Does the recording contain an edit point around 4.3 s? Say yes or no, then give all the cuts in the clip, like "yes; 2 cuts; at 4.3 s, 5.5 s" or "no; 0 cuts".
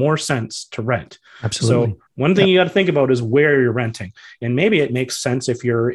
no; 1 cut; at 2.1 s